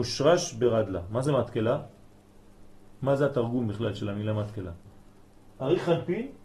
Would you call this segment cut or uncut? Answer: cut